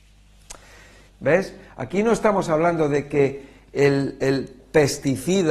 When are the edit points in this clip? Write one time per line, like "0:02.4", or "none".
0:01.1